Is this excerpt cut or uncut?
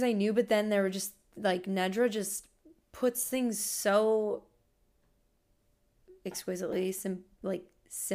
uncut